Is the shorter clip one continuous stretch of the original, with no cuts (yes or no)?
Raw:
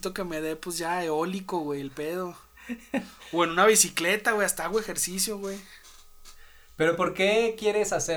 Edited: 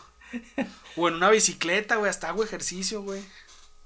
yes